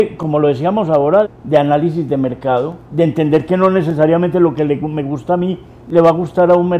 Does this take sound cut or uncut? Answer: cut